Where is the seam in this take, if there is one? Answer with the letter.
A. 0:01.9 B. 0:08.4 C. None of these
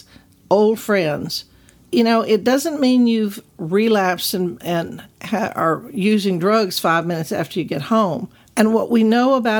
B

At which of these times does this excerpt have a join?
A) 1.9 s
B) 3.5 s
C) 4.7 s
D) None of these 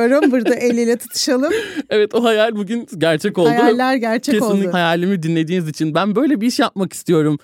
C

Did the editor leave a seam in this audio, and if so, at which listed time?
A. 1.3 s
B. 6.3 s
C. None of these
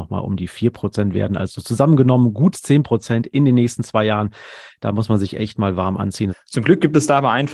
B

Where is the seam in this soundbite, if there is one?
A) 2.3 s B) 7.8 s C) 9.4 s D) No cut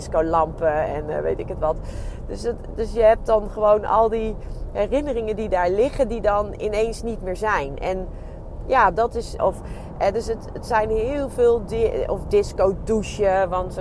C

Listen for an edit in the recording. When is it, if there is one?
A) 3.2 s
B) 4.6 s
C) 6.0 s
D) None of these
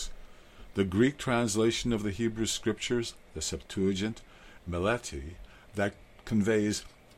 B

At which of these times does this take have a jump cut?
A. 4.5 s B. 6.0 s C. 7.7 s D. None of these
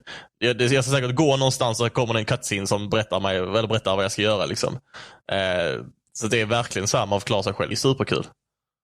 C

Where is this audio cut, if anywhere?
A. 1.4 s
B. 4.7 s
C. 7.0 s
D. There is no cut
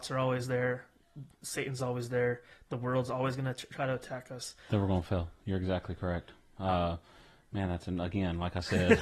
B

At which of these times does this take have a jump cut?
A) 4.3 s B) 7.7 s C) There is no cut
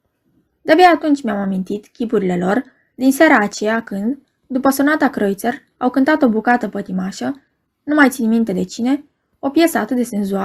C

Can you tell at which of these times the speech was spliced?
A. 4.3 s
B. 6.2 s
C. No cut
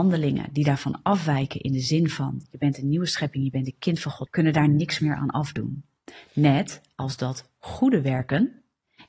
A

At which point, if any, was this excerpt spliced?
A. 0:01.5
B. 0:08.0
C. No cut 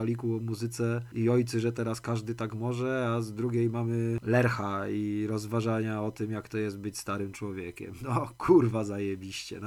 C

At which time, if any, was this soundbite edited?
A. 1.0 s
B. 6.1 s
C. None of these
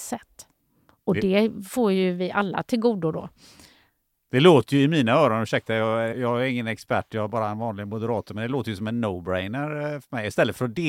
B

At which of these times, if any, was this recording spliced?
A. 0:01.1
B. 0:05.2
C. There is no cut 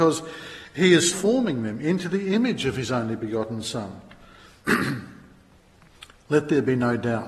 A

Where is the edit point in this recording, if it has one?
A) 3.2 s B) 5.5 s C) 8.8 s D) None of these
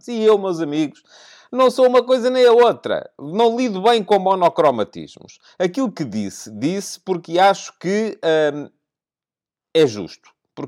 D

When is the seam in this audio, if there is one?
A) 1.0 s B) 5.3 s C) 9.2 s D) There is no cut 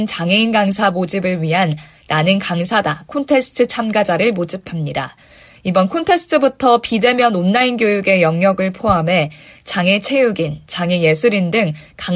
D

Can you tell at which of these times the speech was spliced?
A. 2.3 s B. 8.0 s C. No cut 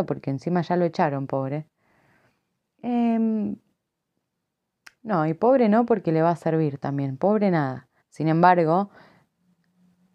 B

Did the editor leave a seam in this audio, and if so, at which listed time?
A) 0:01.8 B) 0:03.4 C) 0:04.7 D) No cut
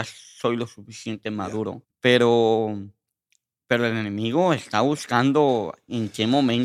A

